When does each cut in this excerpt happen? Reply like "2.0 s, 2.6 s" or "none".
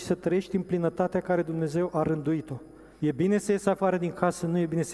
3.0 s